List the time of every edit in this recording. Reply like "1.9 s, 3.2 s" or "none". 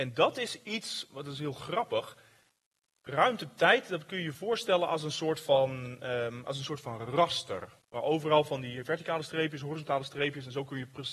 none

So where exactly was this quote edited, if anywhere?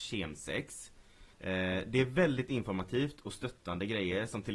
1.3 s

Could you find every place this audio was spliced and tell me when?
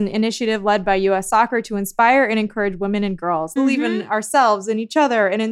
3.6 s

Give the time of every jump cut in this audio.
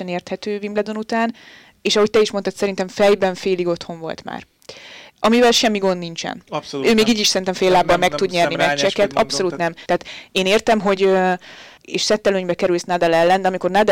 9.9 s, 11.8 s

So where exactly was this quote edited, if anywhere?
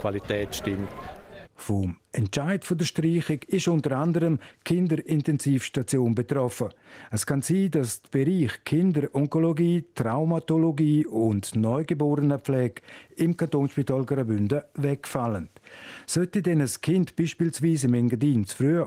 1.4 s

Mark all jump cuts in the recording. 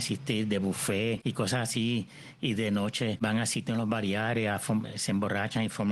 none

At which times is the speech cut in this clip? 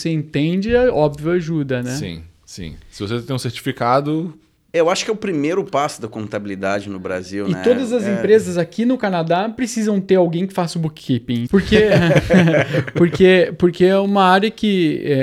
11.5 s

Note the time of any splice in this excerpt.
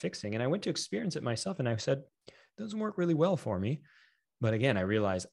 2.1 s

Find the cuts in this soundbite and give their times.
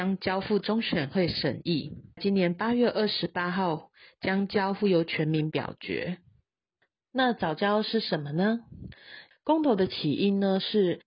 2.2 s, 9.3 s

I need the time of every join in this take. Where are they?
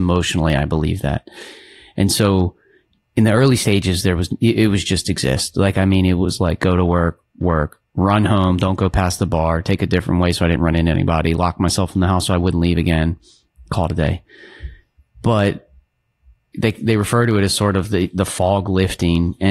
none

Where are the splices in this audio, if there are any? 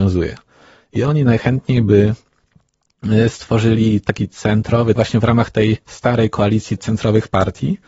5.0 s, 6.8 s

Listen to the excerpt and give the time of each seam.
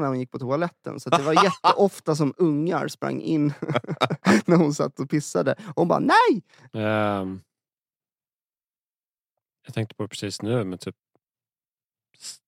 6.7 s

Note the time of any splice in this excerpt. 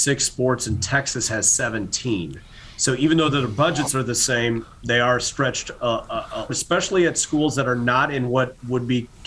6.5 s

